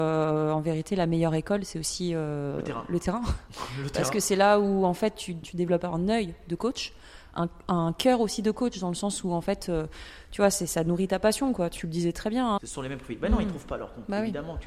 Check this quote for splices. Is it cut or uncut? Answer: cut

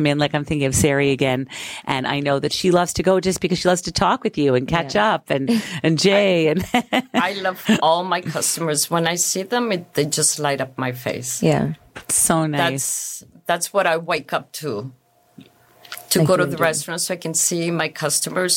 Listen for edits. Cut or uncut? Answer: uncut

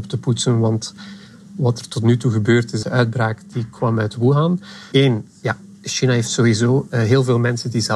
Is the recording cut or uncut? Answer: cut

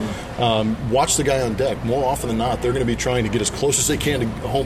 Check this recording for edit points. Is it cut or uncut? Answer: uncut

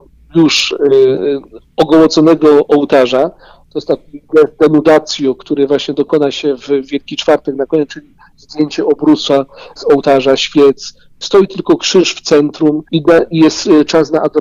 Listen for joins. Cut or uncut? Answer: cut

